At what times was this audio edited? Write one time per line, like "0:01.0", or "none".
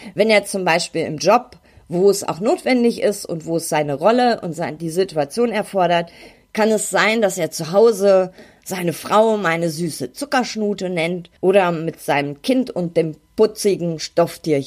0:06.3
0:11.4

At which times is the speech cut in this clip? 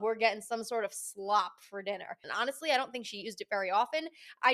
0:02.2

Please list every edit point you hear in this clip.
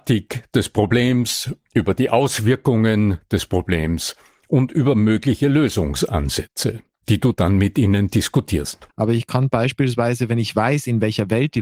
0:08.9

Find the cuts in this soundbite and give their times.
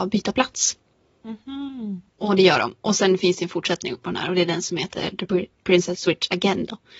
0:02.1
0:06.0

